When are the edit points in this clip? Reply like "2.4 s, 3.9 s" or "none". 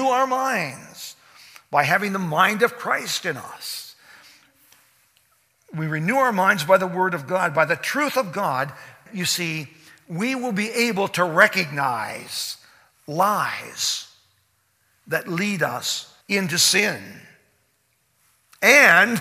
9.1 s, 16.2 s